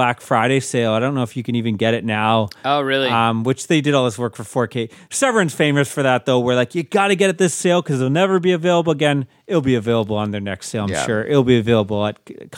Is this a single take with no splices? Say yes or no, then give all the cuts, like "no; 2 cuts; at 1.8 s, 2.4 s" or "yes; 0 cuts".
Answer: yes; 0 cuts